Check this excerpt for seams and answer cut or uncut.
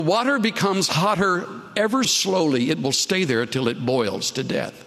cut